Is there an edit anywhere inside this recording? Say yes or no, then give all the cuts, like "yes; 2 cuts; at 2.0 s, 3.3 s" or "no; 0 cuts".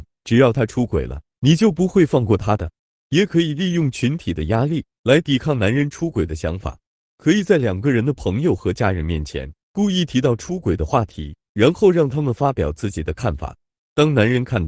no; 0 cuts